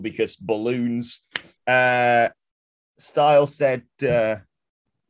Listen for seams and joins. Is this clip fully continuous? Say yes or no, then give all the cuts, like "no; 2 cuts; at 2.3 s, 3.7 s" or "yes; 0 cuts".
no; 1 cut; at 1.6 s